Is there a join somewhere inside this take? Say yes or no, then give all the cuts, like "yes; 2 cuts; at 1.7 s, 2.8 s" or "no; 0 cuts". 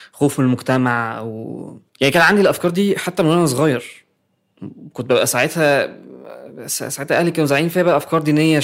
yes; 1 cut; at 1.9 s